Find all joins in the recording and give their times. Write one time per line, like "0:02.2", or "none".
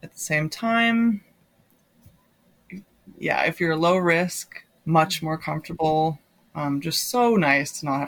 0:04.8